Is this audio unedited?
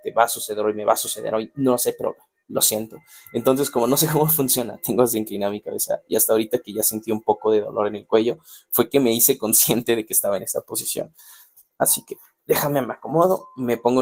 yes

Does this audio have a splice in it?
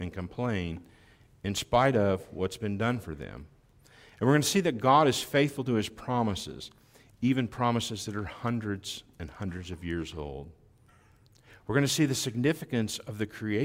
no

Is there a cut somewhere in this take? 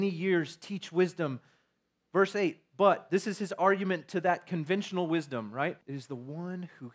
yes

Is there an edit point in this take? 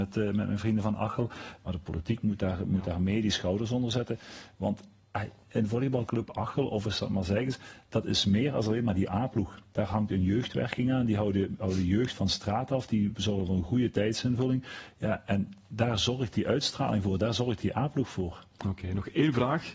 yes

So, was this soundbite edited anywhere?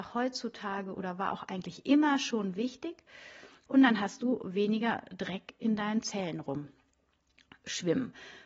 yes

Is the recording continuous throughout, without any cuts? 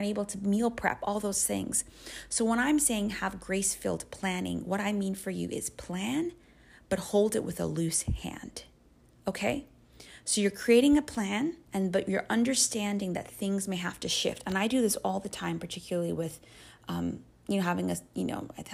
no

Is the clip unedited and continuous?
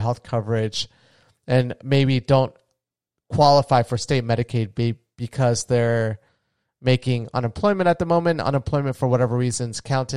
yes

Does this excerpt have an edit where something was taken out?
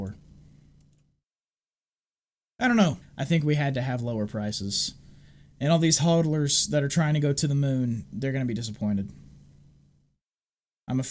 yes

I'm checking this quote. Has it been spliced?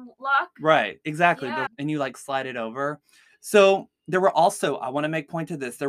yes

